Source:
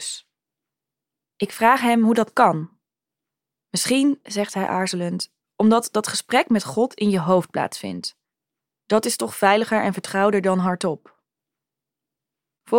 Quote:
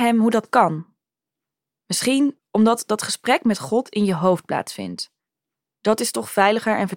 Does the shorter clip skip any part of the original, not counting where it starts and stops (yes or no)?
yes